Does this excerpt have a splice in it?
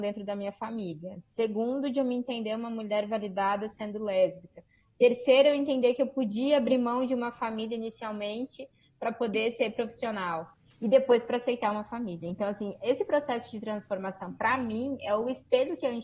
no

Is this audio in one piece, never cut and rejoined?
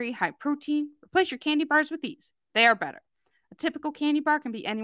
yes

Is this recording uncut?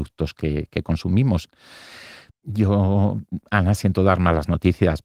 no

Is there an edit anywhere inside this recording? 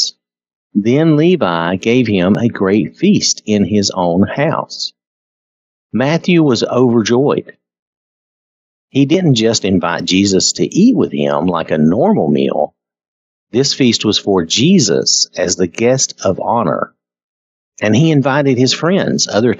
yes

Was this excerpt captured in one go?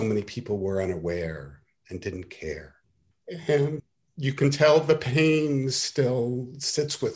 yes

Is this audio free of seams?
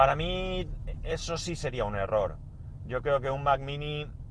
yes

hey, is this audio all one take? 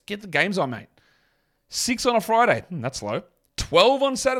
yes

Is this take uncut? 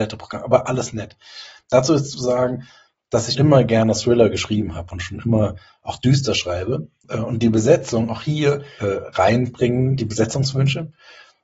no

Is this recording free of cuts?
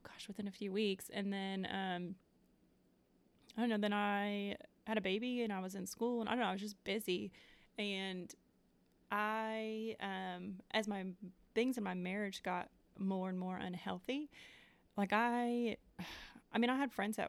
yes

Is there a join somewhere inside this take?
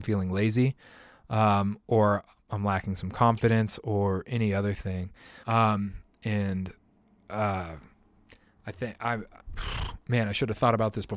yes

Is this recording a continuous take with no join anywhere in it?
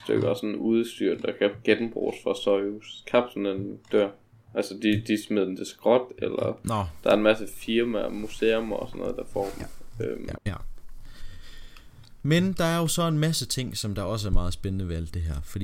no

